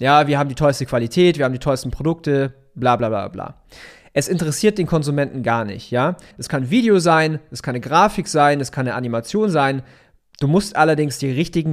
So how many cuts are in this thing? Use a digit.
1